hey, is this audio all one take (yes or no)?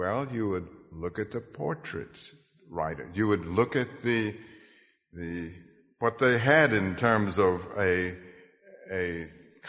yes